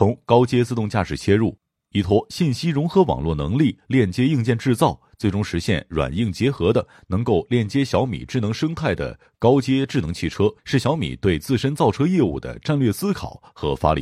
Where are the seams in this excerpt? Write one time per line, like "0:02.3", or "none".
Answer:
none